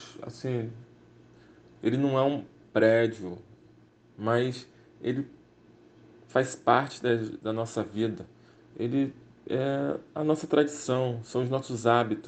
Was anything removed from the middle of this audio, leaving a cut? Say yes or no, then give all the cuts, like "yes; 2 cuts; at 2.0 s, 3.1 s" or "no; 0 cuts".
no; 0 cuts